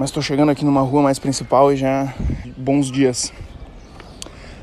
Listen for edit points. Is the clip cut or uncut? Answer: cut